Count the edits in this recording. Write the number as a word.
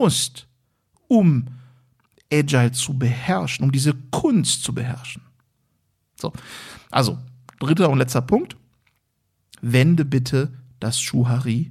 zero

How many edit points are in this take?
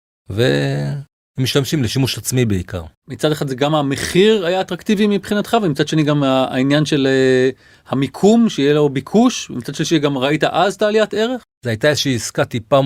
one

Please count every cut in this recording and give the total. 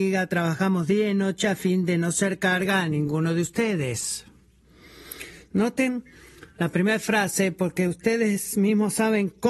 zero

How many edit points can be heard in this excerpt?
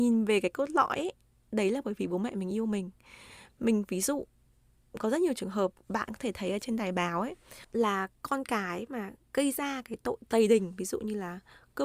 zero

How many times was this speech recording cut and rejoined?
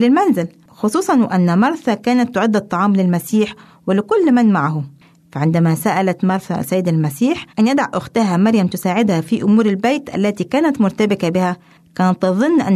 two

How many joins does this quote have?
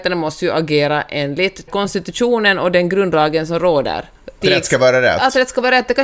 two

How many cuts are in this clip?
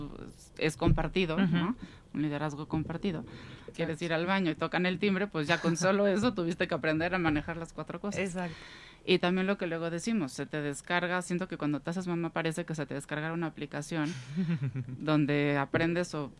one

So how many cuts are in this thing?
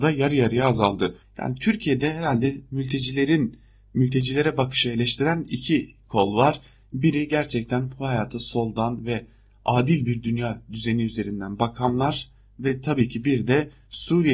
one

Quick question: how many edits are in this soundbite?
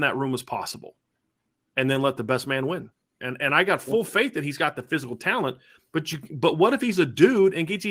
one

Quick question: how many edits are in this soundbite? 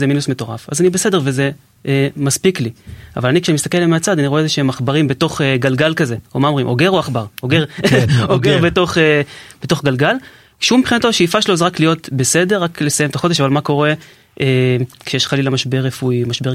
zero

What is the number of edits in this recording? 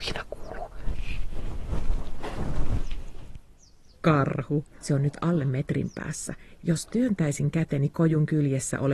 one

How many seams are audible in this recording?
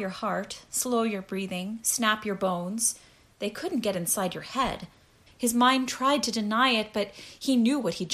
one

